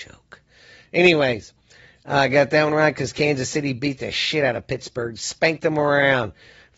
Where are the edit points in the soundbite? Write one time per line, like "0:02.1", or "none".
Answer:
none